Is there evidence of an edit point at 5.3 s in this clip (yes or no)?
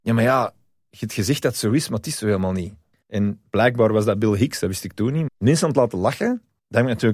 yes